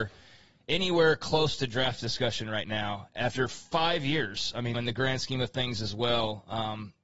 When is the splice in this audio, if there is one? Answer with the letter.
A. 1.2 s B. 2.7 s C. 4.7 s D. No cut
C